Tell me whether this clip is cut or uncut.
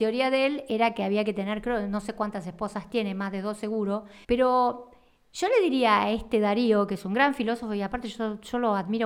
cut